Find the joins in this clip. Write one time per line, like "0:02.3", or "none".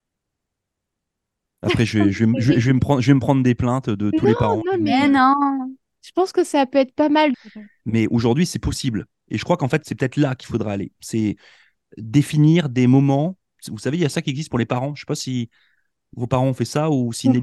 0:07.3
0:09.8